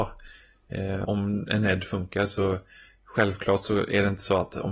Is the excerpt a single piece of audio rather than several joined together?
no; 1 cut; at 1.0 s

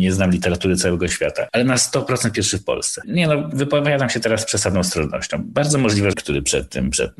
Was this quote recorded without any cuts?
no; 2 cuts; at 3.0 s, 6.1 s

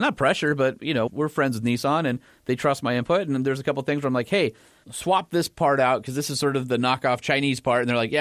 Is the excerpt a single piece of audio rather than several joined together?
no; 1 cut; at 1.1 s

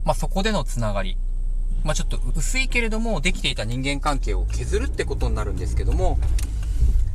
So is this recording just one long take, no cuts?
no; 1 cut; at 2.3 s

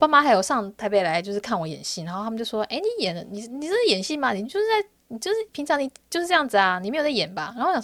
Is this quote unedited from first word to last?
yes; 0 cuts

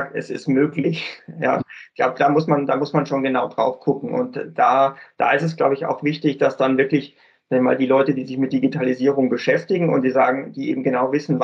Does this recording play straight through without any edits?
no; 1 cut; at 1.6 s

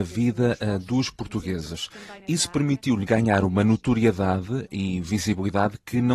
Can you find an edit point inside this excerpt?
no; 0 cuts

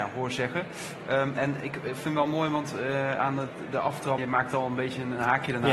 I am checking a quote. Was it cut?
yes; 1 cut; at 4.2 s

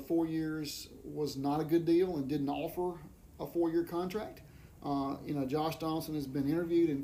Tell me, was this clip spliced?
no; 0 cuts

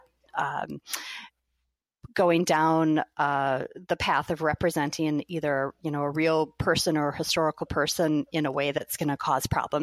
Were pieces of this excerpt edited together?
no; 0 cuts

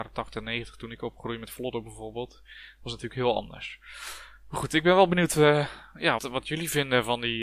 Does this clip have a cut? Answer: yes; 1 cut; at 6.2 s

